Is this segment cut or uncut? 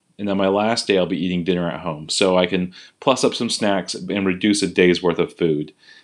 uncut